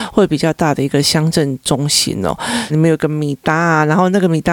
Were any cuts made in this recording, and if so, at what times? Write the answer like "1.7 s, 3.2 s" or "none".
2.7 s